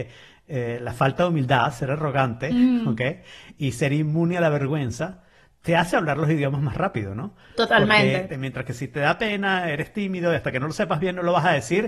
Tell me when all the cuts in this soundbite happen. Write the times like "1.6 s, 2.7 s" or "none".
8.3 s